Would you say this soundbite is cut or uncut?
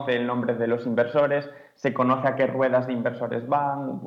uncut